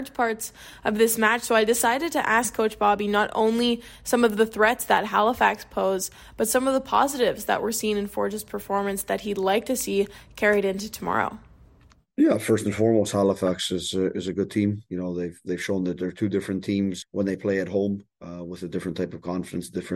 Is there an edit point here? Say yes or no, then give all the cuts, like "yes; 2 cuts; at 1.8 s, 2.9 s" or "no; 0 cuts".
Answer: yes; 1 cut; at 17.0 s